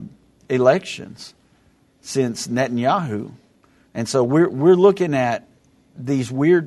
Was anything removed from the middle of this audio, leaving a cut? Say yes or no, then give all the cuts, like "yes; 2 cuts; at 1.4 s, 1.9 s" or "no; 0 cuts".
no; 0 cuts